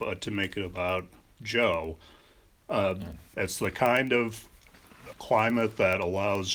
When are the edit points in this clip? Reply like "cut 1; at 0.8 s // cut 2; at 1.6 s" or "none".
cut 1; at 3.3 s // cut 2; at 5.1 s